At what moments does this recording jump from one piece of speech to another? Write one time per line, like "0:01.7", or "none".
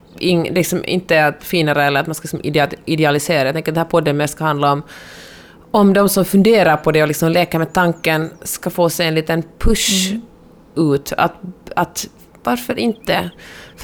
0:01.4